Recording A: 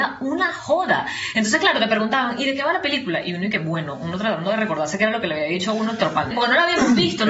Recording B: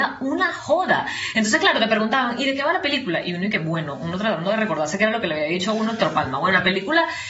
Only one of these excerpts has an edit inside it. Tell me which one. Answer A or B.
A